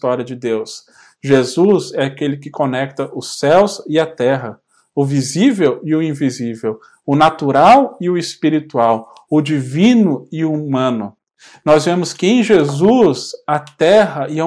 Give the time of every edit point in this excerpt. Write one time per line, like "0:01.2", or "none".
none